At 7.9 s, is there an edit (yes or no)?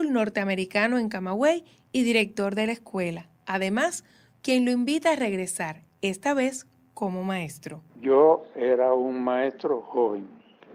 no